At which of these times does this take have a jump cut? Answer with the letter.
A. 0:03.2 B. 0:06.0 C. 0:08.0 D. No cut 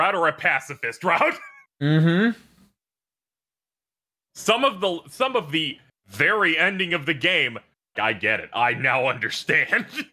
C